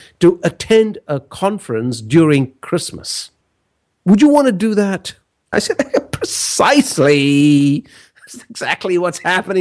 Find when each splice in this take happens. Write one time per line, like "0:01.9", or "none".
0:05.5